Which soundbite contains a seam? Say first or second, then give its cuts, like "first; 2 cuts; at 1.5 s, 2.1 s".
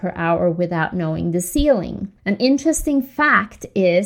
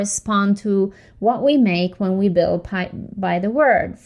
first; 1 cut; at 2.2 s